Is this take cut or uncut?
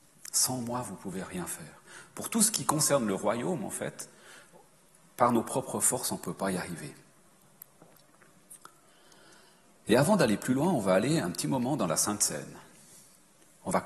uncut